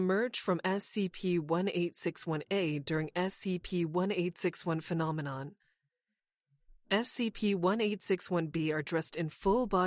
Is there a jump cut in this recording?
no; 0 cuts

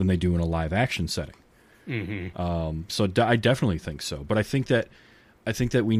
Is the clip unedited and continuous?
yes; 0 cuts

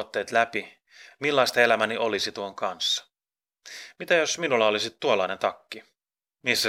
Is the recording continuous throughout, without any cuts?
no; 1 cut; at 1.1 s

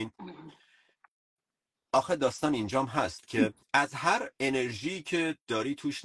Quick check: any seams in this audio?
yes; 1 cut; at 3.6 s

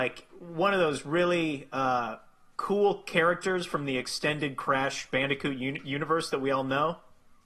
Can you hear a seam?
no; 0 cuts

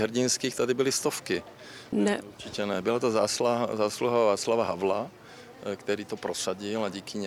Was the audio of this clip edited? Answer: yes; 1 cut; at 1.9 s

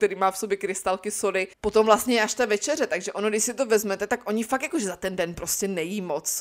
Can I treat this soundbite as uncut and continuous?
no; 1 cut; at 1.5 s

